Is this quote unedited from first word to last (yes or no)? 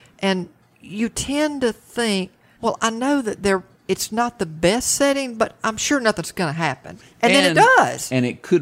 yes